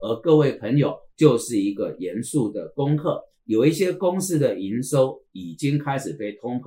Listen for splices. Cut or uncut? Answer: cut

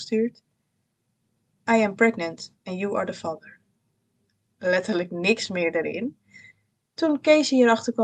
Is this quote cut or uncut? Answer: cut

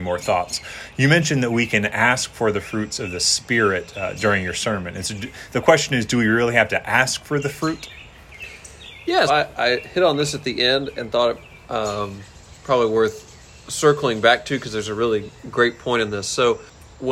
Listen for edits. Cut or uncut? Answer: cut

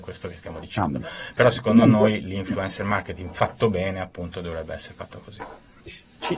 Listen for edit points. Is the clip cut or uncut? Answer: uncut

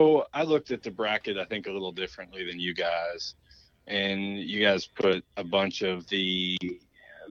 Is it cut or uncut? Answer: uncut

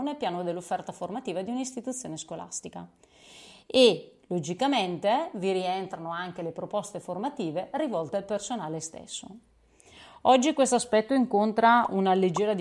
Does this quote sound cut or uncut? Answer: uncut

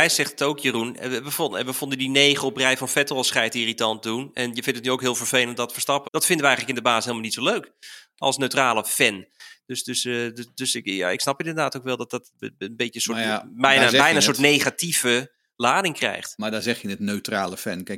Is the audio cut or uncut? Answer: cut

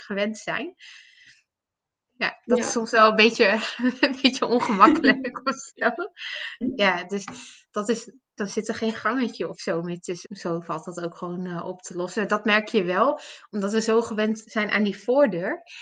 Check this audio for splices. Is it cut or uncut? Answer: cut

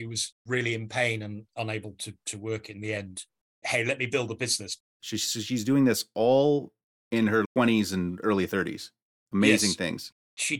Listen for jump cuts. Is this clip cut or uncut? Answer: cut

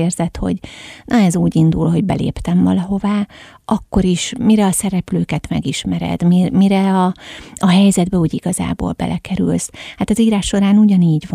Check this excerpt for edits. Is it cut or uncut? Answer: uncut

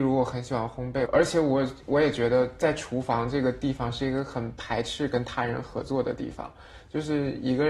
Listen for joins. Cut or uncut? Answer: cut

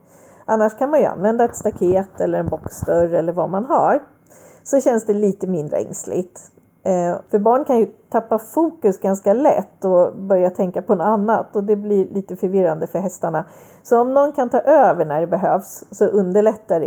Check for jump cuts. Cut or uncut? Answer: cut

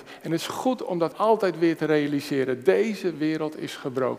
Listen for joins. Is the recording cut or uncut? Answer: cut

